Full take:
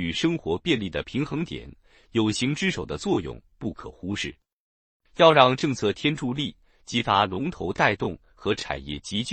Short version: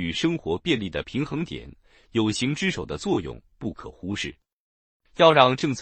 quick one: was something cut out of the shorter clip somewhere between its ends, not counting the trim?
no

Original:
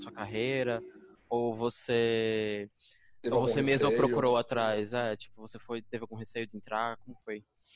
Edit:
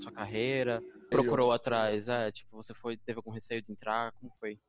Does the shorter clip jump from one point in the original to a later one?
yes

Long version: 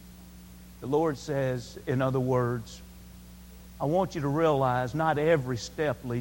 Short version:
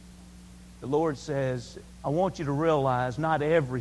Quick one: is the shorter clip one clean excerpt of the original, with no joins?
no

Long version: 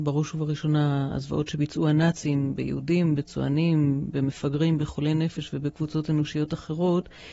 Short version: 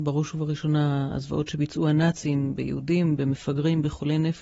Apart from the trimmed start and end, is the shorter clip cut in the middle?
yes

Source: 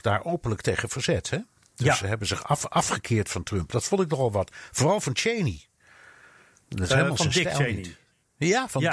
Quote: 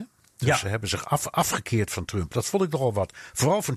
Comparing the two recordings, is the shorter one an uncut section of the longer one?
yes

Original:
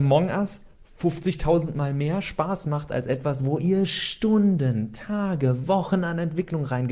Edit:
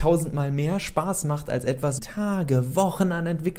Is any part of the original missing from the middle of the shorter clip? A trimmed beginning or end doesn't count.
yes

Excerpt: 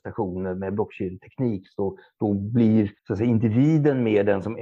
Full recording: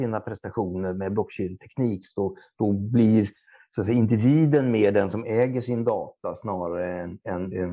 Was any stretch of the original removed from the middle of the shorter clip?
yes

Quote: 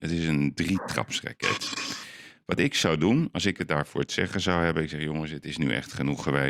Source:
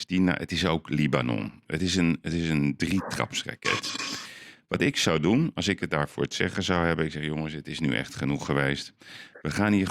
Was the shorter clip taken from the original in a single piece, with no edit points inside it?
yes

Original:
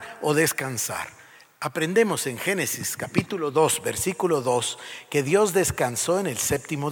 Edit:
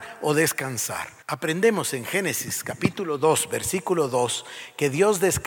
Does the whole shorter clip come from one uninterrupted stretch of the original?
no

